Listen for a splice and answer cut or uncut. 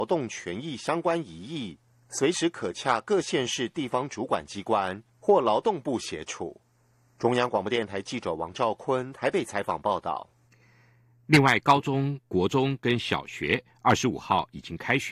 uncut